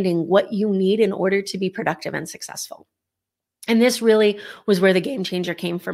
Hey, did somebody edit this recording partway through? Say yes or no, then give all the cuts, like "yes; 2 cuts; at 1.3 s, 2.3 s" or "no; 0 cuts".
no; 0 cuts